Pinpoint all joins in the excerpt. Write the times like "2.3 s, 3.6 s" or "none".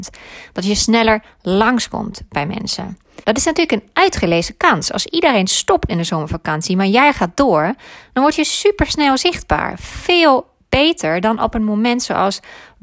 3.2 s